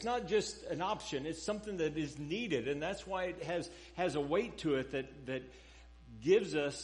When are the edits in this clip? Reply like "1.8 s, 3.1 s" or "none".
none